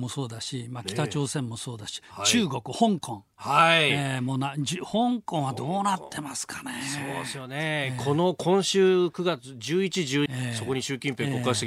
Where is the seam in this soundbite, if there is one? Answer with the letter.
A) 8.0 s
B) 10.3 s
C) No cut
B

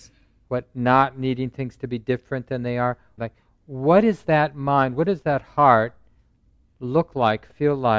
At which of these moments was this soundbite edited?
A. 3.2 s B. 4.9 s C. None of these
A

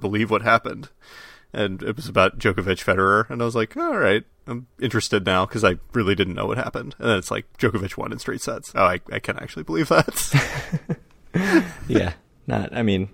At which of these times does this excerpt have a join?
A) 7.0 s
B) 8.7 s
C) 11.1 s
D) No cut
B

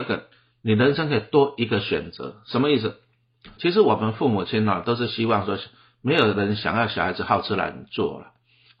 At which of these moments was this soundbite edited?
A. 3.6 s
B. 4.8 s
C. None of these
A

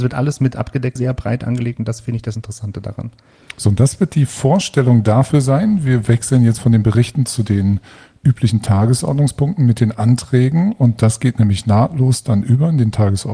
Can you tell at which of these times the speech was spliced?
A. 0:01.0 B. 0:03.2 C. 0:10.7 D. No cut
A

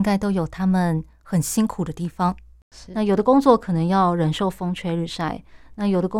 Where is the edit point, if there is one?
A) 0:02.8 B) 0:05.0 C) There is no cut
C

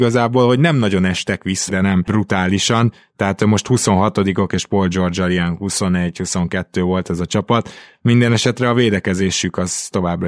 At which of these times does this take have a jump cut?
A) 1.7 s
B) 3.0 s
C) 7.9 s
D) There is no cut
A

